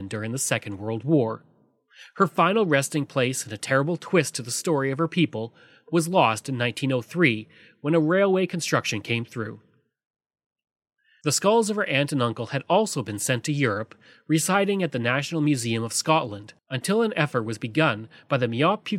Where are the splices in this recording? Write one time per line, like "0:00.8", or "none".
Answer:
none